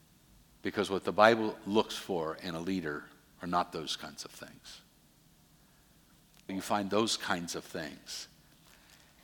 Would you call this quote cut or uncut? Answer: cut